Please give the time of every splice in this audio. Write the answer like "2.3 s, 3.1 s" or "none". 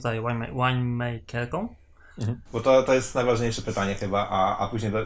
2.5 s